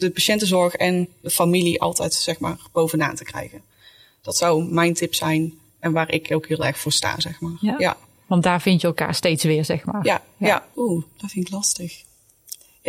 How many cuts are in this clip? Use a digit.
1